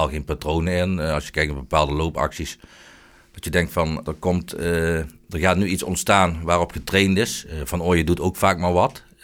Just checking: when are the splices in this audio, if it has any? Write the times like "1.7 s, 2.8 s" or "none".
4.1 s